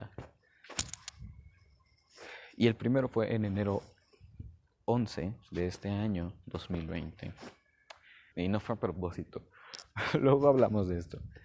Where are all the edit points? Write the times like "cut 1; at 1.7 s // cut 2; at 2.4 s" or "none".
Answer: cut 1; at 8.3 s